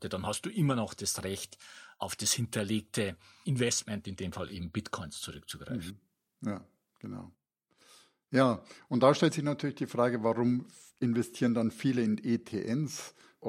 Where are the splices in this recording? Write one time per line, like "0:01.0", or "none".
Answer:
none